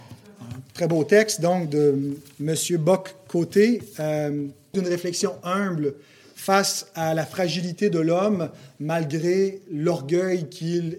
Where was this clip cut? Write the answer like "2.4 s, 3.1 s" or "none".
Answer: 4.7 s